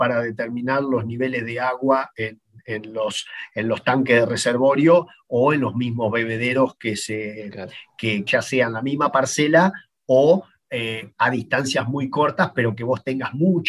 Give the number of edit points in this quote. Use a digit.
1